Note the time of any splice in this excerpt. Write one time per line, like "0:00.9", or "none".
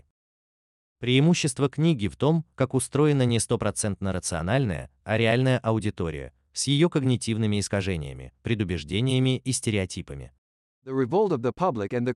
0:02.5
0:10.6